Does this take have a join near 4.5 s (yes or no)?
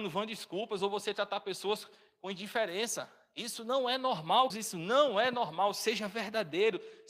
yes